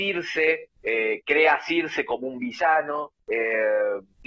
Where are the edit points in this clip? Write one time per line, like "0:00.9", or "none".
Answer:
none